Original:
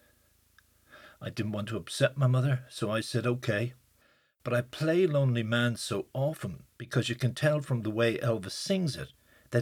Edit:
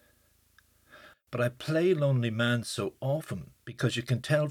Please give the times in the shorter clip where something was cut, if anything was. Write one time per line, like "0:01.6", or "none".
0:01.1